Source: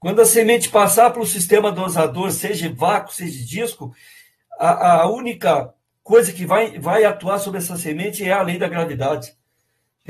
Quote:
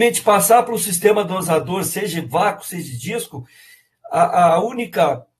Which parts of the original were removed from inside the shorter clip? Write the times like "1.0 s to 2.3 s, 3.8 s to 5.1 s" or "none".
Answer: none